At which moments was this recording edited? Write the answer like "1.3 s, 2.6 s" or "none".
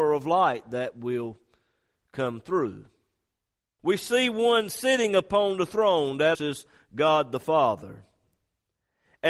3.8 s, 6.3 s